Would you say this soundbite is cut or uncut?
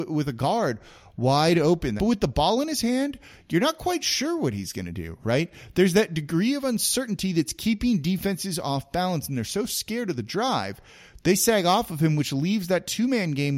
cut